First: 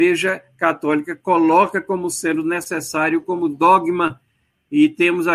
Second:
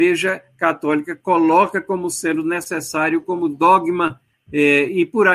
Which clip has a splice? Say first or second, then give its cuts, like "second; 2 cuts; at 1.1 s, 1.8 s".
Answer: second; 1 cut; at 4.3 s